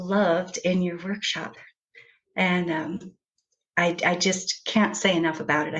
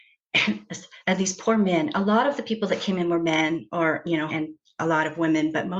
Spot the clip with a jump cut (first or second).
second